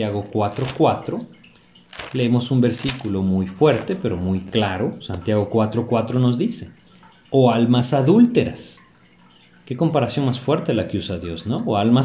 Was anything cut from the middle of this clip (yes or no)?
no